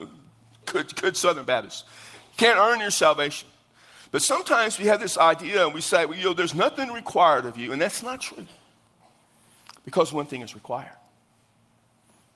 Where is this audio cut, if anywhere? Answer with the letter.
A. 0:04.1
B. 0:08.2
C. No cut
B